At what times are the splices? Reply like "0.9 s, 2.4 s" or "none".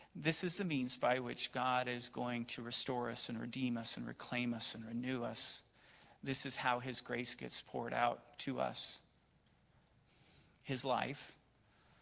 none